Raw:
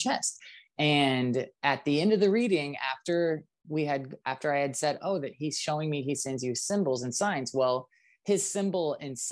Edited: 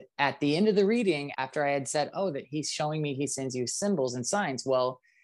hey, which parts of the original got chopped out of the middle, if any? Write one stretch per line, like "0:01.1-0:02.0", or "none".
0:02.8-0:04.2